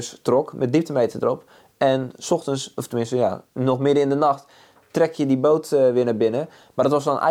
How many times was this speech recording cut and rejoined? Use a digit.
1